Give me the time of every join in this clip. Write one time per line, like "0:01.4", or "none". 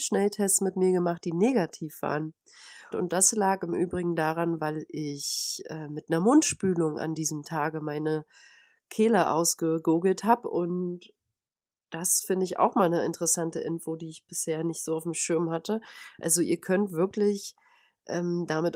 0:02.9